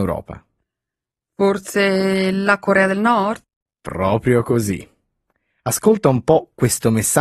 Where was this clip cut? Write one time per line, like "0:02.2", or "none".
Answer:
none